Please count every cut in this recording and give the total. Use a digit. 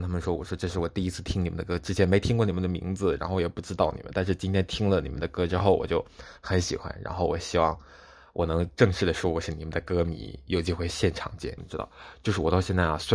1